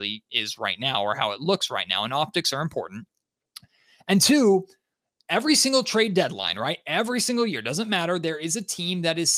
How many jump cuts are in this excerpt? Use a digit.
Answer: 0